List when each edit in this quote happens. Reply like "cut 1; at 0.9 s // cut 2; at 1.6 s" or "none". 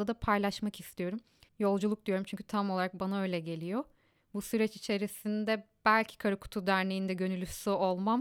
cut 1; at 1.5 s